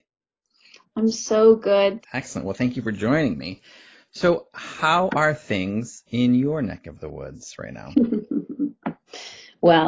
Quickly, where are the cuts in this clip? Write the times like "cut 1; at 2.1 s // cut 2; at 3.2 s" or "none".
cut 1; at 2.0 s